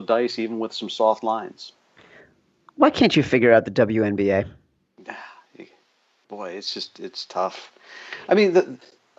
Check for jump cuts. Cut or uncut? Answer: uncut